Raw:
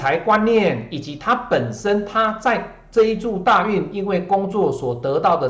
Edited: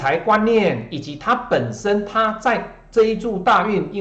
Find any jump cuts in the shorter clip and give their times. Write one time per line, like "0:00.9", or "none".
none